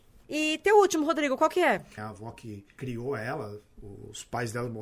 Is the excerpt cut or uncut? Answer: cut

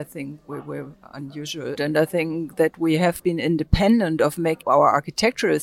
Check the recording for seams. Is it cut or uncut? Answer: cut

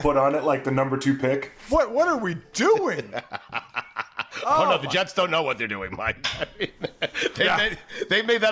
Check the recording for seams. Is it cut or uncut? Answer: uncut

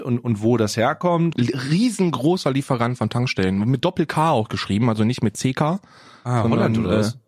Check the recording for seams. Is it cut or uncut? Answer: cut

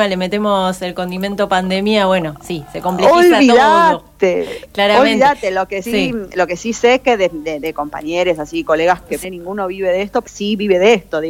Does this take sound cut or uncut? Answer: cut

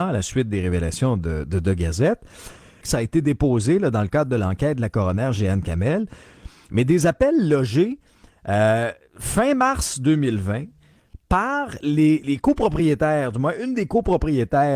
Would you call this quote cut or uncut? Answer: cut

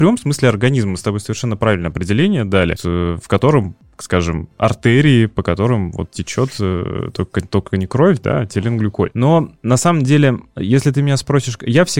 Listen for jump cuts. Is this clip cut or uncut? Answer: cut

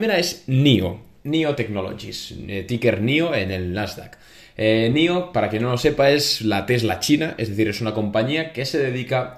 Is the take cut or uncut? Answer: uncut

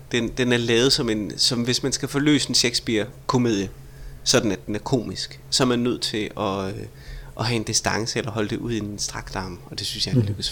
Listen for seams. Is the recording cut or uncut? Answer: uncut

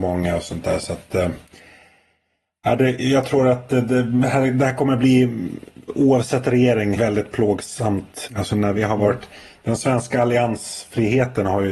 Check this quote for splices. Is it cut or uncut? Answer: cut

